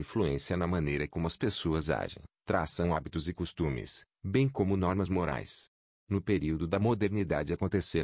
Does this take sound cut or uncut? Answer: cut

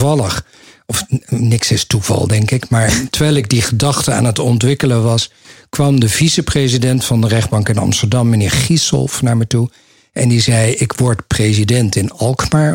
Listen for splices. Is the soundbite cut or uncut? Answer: uncut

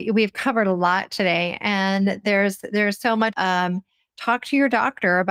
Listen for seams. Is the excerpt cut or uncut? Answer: cut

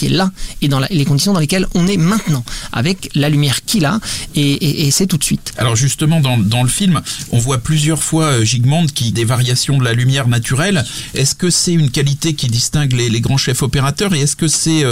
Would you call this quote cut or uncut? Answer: cut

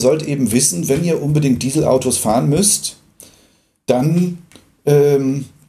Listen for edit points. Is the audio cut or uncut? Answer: uncut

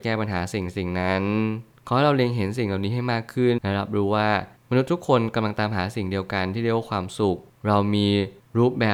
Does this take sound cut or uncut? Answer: cut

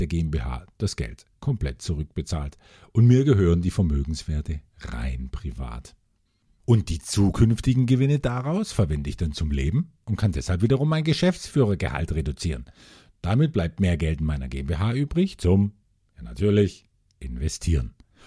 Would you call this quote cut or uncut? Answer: uncut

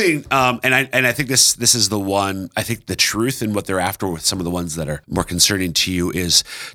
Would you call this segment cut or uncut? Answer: cut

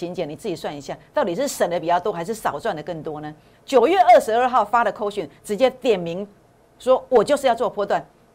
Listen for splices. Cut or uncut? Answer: cut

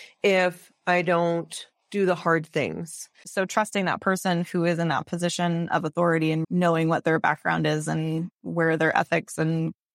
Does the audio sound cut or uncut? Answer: cut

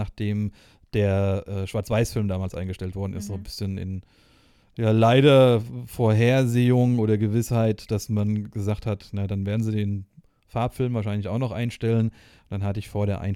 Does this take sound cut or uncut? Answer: uncut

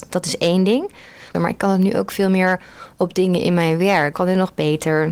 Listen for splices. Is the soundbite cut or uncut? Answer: cut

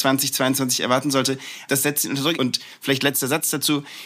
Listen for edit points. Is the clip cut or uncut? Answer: cut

